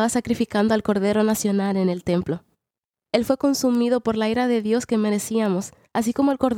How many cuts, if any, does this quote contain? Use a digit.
1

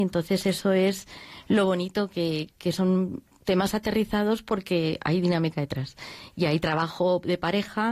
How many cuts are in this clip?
0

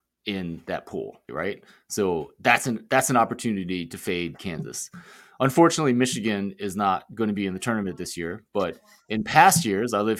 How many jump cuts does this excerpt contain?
1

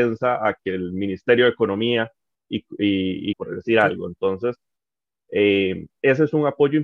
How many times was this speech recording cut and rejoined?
1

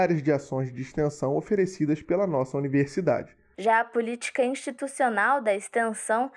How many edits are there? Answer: 1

